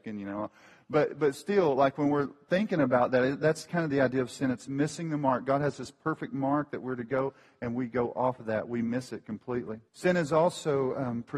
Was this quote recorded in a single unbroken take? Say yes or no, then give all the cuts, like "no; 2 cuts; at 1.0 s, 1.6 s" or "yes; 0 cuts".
no; 1 cut; at 9.9 s